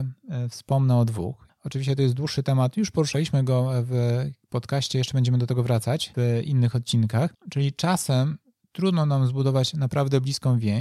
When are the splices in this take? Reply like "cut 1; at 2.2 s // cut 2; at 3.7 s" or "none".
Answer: cut 1; at 1.5 s